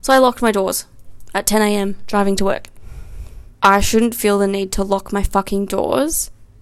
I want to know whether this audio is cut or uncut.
cut